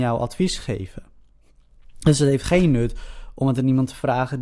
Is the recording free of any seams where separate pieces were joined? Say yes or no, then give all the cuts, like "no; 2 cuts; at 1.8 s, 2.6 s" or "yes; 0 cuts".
yes; 0 cuts